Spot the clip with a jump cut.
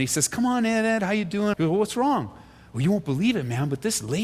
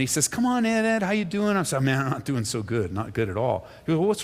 first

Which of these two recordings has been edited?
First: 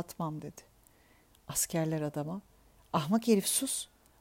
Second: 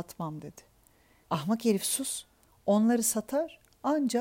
second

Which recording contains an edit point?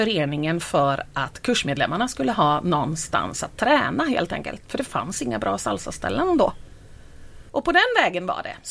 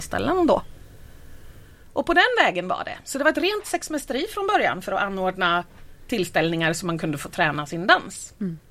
first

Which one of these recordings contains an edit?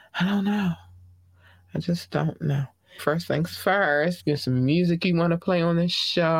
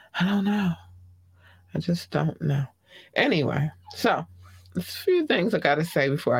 first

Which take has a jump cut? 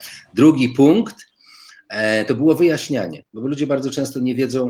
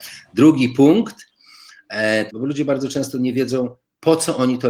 second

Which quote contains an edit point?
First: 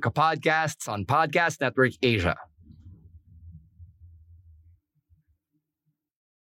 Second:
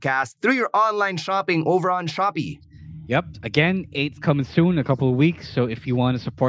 second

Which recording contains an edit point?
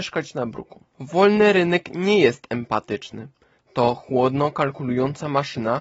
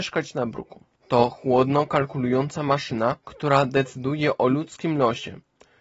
second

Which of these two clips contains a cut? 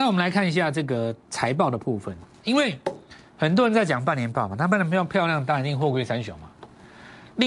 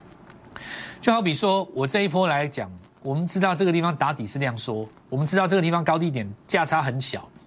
second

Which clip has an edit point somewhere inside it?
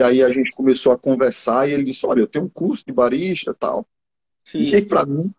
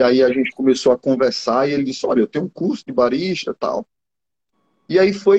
first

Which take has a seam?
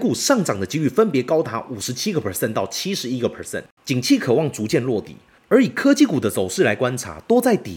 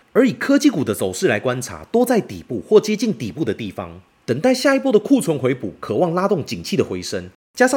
first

